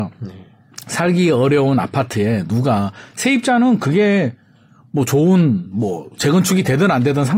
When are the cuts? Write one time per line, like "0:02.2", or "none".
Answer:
none

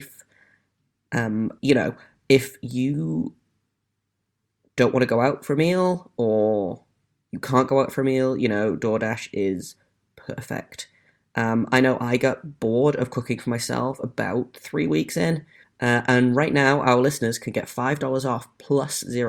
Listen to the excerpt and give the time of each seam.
0:01.6
0:15.6

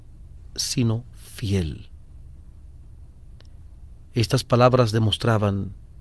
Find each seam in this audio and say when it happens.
none

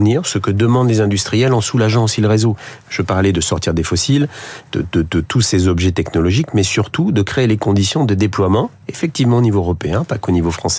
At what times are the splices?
0:02.8

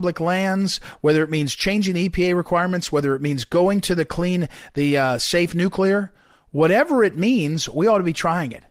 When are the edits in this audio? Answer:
none

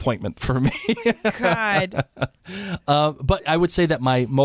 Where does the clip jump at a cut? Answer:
none

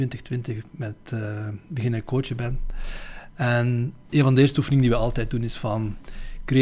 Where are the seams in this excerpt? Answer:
0:04.1

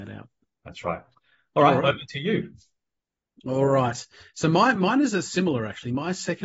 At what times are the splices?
none

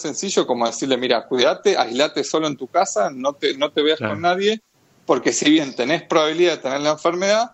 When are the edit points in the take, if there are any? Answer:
none

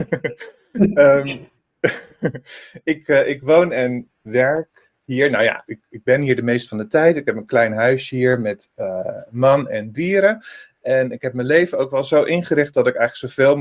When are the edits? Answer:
0:05.7

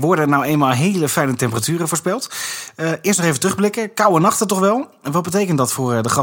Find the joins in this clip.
none

